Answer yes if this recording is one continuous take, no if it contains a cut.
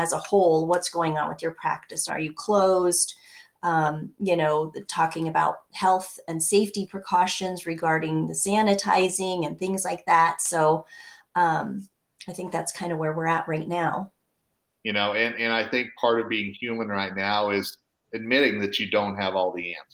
no